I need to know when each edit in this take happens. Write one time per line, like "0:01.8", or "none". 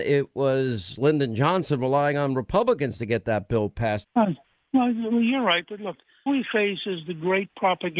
0:04.0
0:06.3